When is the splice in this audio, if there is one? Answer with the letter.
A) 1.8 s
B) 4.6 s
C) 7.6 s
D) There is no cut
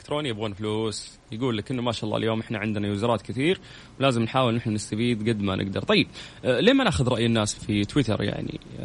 C